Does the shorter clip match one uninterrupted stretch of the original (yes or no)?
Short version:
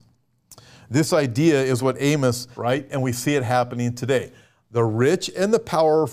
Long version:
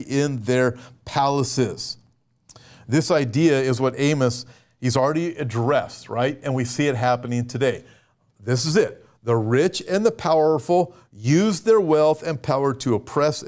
no